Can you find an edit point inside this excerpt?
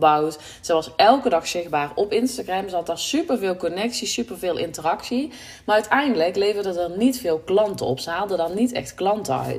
no; 0 cuts

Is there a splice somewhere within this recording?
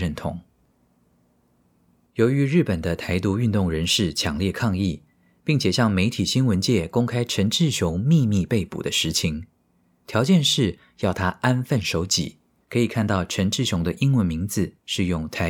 yes; 2 cuts; at 10.0 s, 12.6 s

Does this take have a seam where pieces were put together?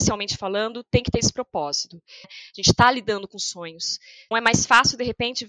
yes; 2 cuts; at 2.2 s, 4.3 s

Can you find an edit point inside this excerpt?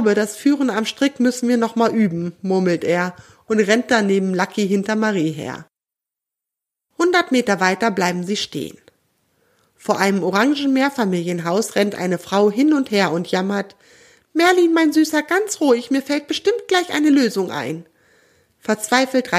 no; 0 cuts

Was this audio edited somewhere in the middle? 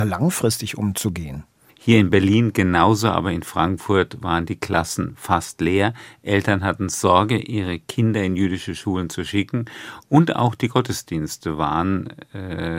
yes; 1 cut; at 1.7 s

